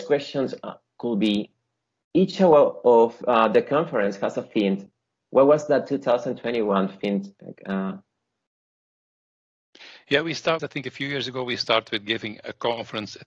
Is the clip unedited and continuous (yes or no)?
no